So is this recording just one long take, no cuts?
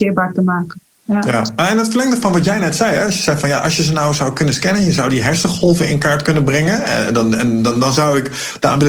yes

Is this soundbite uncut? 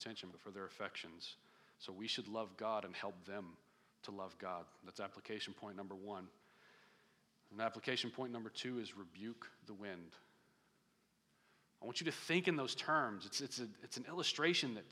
no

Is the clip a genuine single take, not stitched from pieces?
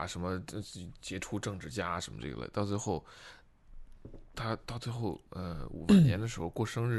yes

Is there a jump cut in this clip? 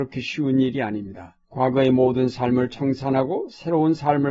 yes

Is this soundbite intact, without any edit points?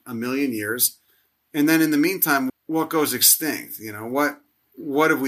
no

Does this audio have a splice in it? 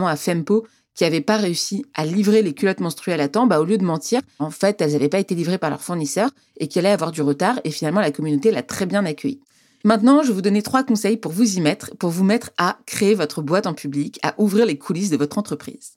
yes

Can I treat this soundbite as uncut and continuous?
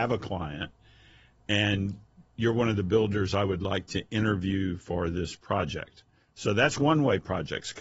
yes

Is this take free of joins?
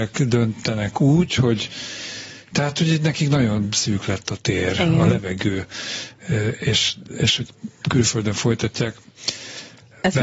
yes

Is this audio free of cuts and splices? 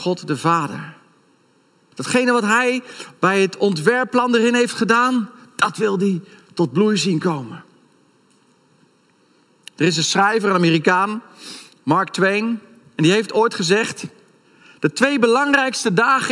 no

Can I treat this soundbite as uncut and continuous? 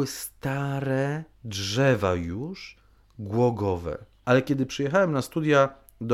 no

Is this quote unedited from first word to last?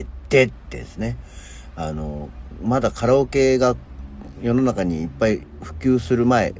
yes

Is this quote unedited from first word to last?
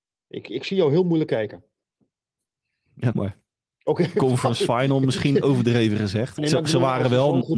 no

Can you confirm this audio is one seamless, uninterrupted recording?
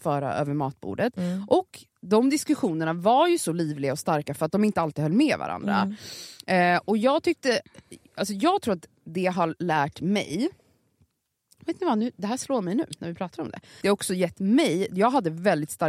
no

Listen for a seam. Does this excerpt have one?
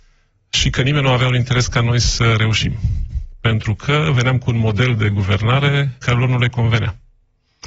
yes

